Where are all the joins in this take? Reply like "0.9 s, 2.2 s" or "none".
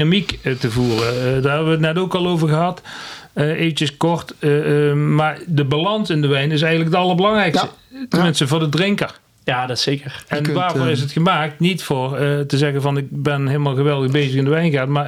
none